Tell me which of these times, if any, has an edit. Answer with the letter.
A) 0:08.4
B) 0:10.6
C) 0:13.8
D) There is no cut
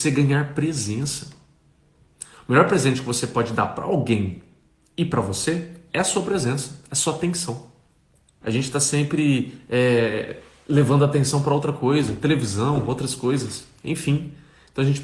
A